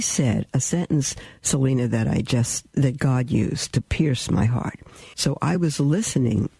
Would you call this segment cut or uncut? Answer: cut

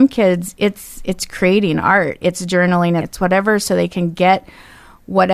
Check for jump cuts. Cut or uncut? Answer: cut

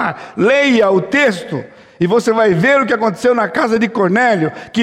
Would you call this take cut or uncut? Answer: uncut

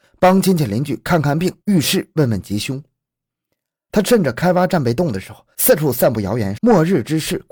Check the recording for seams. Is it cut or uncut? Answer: cut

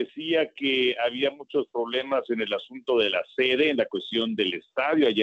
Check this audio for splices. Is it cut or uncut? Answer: uncut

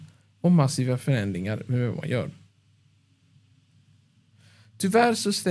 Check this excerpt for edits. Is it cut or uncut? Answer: uncut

